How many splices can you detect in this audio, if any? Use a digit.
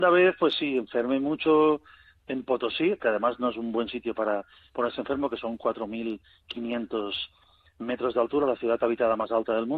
1